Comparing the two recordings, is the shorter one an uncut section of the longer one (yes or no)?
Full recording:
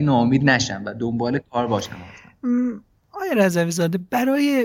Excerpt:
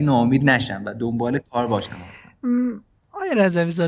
yes